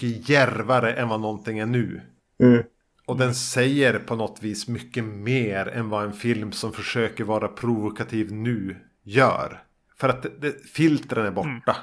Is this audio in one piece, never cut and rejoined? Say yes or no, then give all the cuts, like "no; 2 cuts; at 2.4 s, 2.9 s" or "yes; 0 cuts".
yes; 0 cuts